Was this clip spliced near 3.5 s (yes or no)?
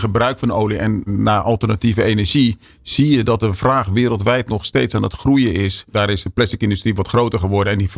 no